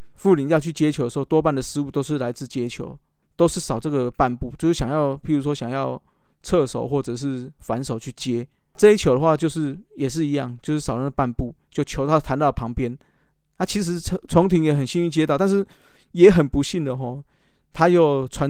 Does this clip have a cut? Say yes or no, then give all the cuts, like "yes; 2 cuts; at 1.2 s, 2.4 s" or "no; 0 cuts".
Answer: no; 0 cuts